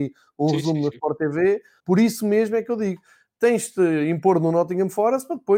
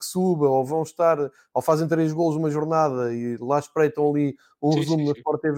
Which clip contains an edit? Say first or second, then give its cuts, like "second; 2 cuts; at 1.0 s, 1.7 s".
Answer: first; 1 cut; at 1.8 s